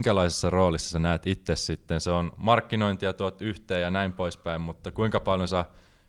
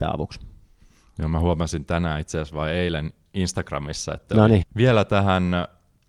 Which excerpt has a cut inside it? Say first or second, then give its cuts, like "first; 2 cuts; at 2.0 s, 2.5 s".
second; 1 cut; at 4.6 s